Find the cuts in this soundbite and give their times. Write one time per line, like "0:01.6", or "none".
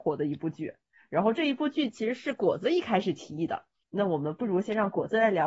none